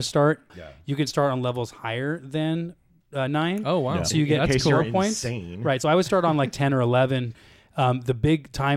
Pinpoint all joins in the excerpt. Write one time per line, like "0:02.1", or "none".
none